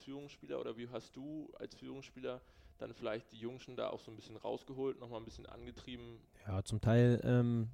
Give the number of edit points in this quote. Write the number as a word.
one